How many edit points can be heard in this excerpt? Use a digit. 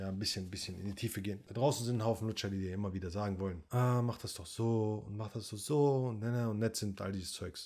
0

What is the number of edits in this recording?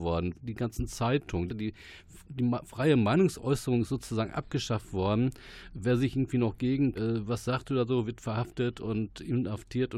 2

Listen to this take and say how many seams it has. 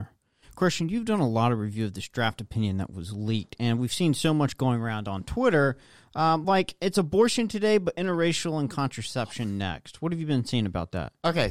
0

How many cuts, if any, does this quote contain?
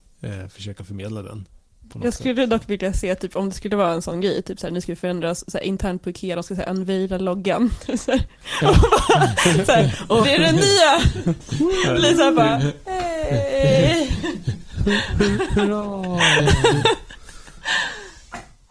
1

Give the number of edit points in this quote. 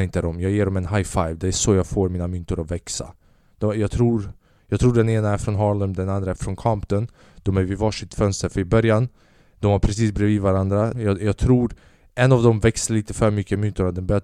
2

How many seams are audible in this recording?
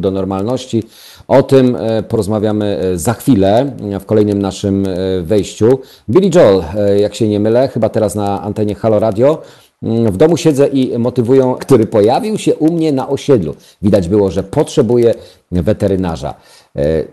1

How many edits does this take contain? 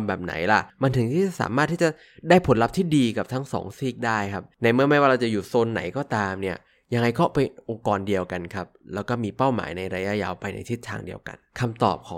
0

